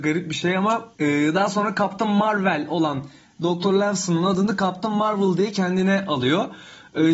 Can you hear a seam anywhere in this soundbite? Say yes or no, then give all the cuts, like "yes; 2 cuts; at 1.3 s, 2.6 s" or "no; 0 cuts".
yes; 1 cut; at 0.9 s